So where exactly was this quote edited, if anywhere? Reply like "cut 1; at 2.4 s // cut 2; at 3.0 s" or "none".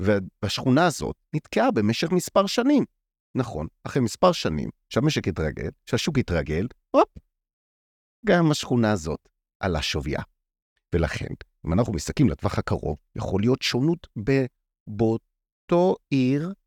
none